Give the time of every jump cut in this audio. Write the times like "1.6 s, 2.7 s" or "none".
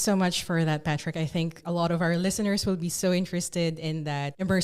none